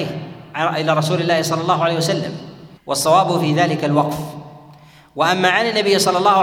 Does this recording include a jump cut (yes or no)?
yes